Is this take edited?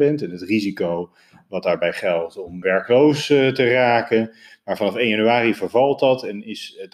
yes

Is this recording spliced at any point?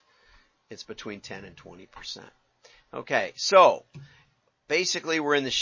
no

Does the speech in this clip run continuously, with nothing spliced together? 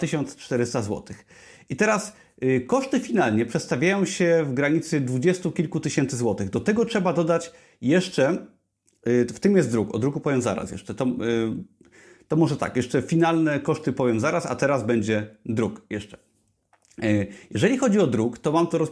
yes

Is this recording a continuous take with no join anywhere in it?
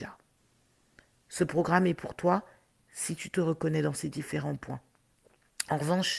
yes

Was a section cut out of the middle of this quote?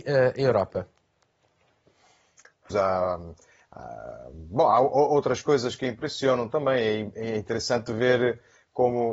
yes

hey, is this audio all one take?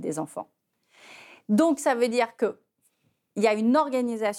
yes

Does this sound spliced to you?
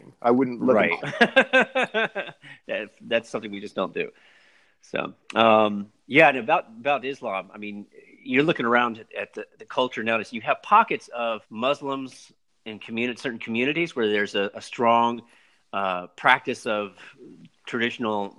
yes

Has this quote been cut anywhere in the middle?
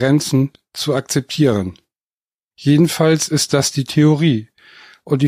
yes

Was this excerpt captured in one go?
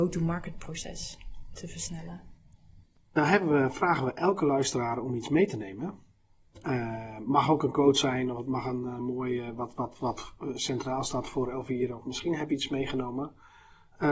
yes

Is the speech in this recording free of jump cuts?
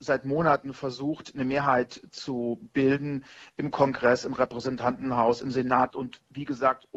no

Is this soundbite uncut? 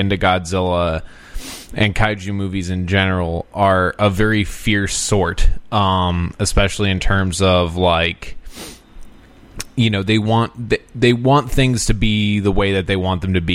yes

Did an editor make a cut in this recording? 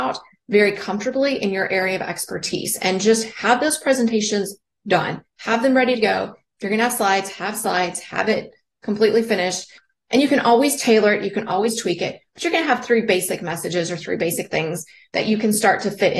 no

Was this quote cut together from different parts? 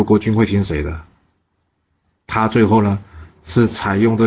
no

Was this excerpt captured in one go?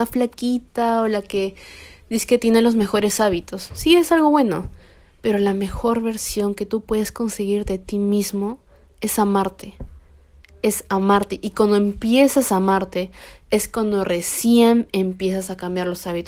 yes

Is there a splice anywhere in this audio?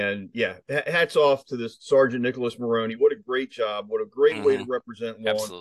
no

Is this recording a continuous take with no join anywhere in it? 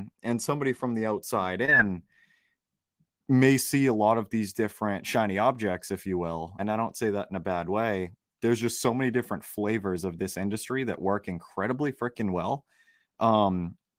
no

